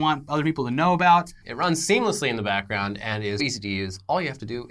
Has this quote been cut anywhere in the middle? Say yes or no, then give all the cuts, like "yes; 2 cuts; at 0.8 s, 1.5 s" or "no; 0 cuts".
yes; 2 cuts; at 1.4 s, 3.4 s